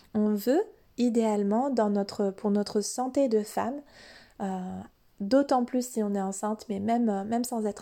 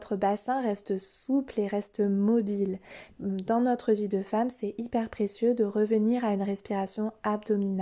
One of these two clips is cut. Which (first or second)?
second